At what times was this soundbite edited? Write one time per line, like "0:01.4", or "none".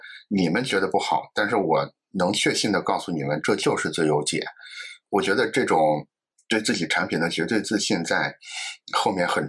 none